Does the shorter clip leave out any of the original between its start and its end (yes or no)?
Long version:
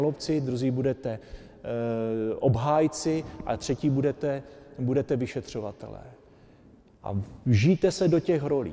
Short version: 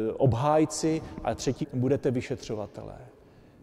yes